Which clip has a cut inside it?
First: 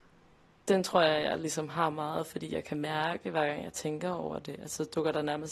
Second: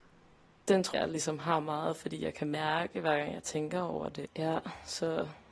second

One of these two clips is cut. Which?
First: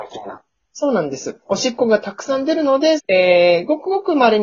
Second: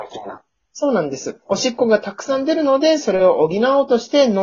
first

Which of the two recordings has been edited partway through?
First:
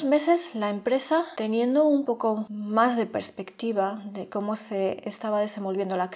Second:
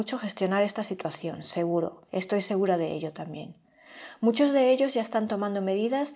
second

